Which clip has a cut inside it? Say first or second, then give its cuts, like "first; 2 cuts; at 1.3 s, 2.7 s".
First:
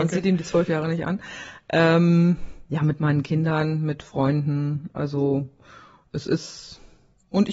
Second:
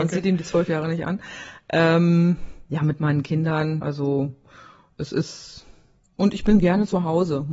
second; 1 cut; at 3.8 s